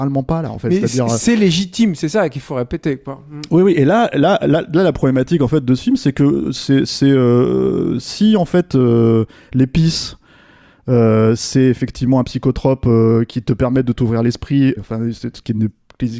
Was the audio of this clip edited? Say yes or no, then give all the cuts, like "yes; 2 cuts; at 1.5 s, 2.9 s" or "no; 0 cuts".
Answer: yes; 1 cut; at 14.8 s